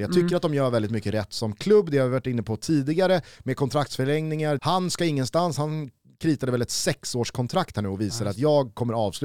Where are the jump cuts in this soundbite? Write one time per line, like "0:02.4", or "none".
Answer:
0:04.6